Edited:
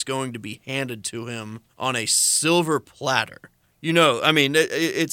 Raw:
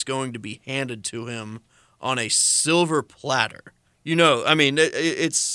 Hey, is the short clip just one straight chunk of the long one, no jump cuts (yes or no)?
no